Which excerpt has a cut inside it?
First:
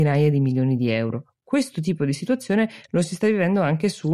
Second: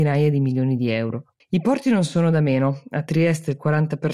second; 1 cut; at 1.4 s

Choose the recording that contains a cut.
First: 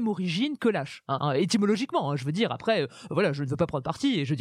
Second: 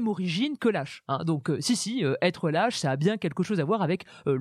first; 1 cut; at 1.2 s

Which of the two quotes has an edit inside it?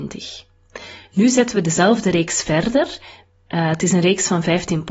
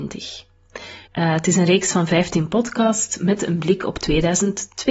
second; 1 cut; at 1.1 s

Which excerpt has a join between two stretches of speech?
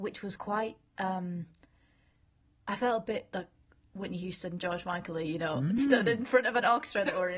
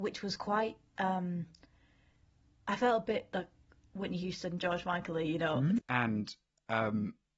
second; 1 cut; at 5.8 s

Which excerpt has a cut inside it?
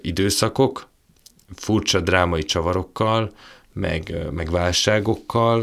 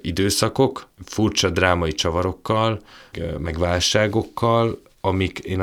second; 2 cuts; at 0.9 s, 3.1 s

